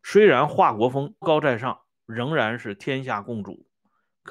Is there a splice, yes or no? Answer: yes